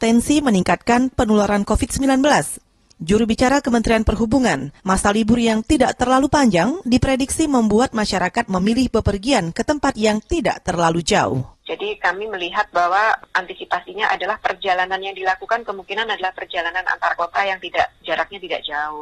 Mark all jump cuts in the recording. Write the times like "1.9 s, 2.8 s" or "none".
4.8 s